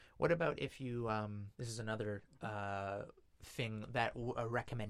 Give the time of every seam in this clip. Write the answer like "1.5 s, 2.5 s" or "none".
1.5 s